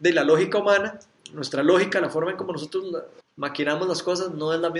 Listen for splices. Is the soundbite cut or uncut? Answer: cut